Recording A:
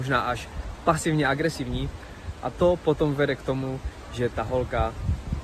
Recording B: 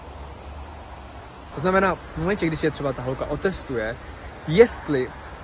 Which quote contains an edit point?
B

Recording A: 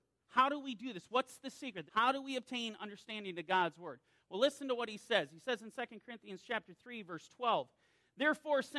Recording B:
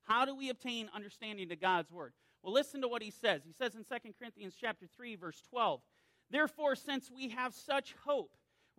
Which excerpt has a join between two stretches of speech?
A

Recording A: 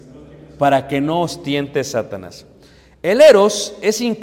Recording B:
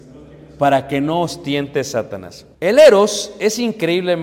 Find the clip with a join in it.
B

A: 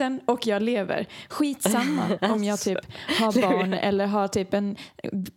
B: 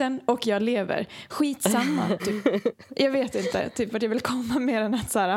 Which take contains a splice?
B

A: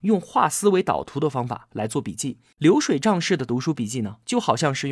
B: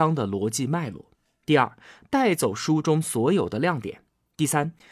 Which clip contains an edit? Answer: A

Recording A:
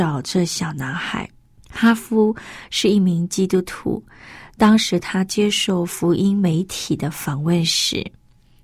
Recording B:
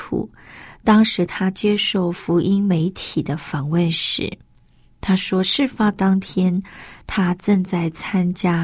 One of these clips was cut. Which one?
A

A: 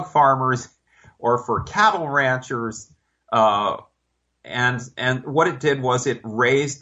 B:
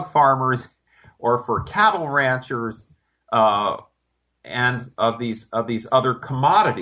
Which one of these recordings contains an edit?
B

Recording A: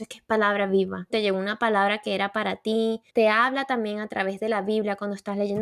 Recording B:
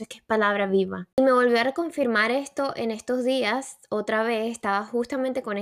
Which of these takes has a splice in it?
A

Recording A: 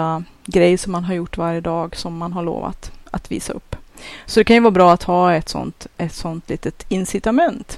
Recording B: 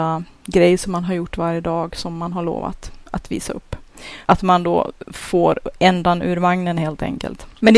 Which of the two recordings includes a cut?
B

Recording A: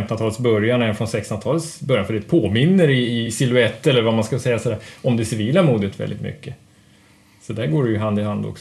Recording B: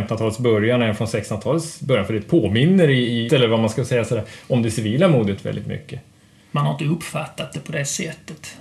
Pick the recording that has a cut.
B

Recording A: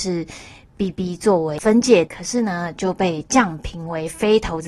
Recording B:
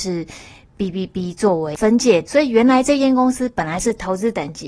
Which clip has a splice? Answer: A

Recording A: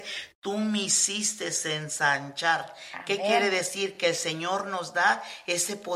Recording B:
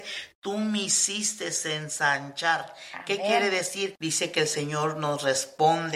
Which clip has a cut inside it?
B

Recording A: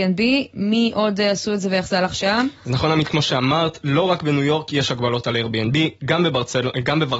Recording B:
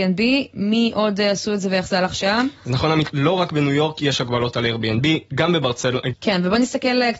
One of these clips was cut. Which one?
B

